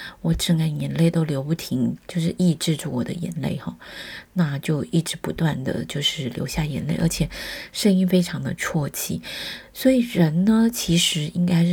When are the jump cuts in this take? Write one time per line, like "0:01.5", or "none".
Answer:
0:02.0

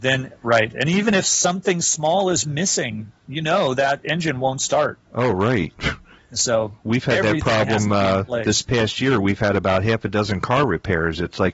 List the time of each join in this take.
none

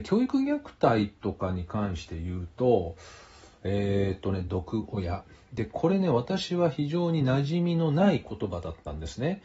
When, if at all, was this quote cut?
0:04.5

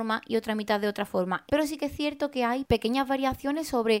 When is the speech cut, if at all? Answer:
0:01.5

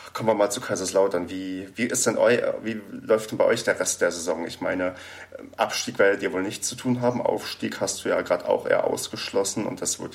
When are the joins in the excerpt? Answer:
0:01.7

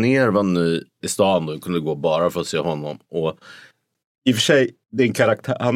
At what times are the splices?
0:01.0

